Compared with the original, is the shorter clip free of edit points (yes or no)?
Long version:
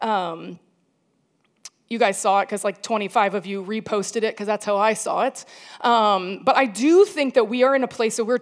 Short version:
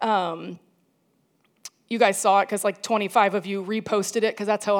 yes